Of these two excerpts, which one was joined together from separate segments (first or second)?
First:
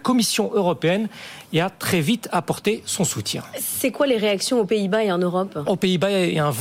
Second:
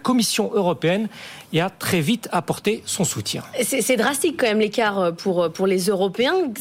first